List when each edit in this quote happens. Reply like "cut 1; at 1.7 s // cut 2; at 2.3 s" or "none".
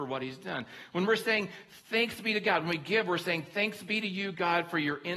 none